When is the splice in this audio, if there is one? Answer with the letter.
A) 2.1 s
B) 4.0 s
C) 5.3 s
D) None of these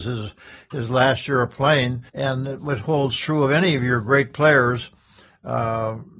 A